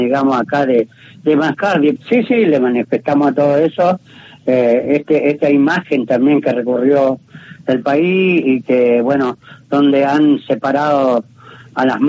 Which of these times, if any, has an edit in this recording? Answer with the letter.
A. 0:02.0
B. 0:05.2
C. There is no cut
A